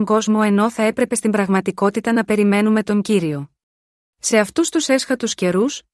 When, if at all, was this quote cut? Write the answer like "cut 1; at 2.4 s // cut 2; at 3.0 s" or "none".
cut 1; at 4.0 s